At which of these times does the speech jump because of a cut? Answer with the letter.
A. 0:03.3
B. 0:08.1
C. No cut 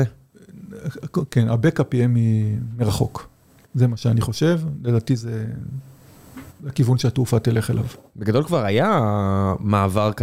C